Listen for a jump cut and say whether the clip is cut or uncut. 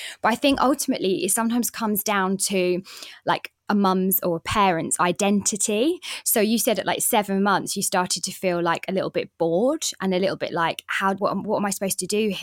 cut